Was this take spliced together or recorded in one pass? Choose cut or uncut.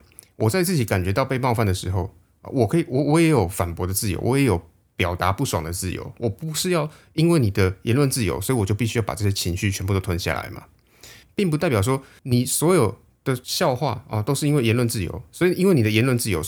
cut